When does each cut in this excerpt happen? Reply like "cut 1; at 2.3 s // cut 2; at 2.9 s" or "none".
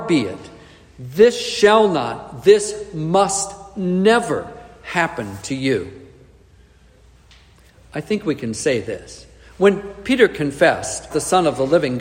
cut 1; at 11.1 s